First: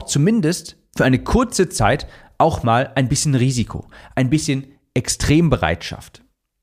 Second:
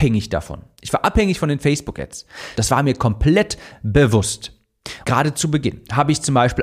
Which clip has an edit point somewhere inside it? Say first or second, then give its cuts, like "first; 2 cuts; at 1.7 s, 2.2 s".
second; 2 cuts; at 2.5 s, 5.0 s